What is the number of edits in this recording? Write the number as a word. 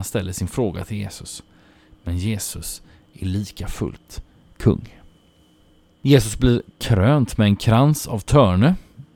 zero